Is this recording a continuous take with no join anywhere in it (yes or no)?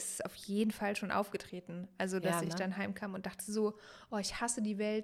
yes